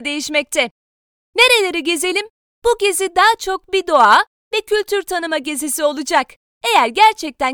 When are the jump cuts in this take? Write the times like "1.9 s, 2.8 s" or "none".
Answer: 2.5 s